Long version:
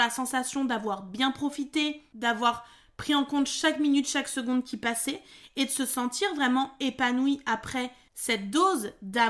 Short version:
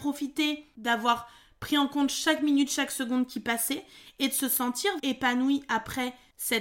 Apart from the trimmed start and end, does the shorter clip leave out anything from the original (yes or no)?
yes